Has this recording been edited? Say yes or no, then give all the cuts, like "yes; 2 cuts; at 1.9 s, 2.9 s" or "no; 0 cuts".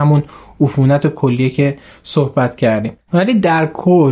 yes; 1 cut; at 3.0 s